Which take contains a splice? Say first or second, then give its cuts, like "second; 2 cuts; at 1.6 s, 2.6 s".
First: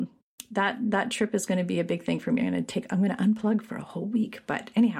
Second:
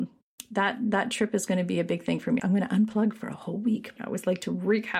second; 2 cuts; at 2.4 s, 4.0 s